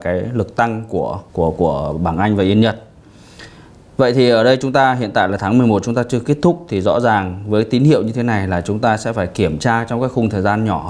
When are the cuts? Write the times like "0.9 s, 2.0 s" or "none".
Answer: 1.3 s